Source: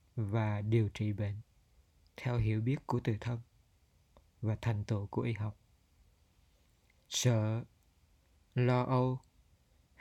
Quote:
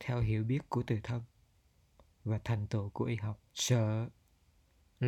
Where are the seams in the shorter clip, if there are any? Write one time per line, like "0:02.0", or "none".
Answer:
0:03.5